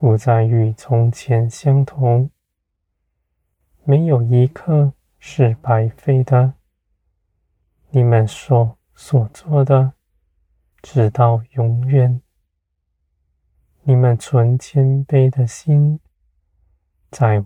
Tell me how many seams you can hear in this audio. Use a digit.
1